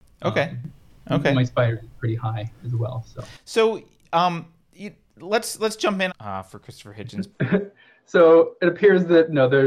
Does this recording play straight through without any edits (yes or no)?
no